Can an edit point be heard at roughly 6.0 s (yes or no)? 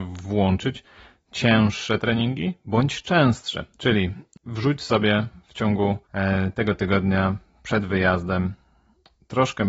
yes